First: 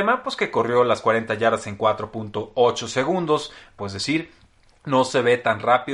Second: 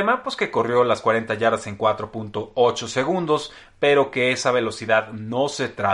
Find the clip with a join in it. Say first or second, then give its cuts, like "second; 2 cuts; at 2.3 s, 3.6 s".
first; 1 cut; at 3.8 s